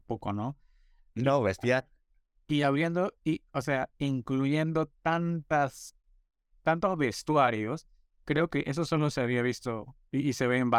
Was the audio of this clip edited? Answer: no; 0 cuts

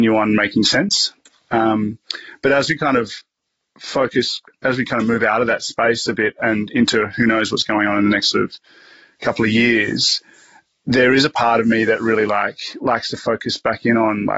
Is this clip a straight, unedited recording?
yes; 0 cuts

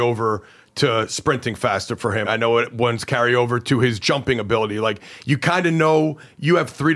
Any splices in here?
yes; 1 cut; at 2.2 s

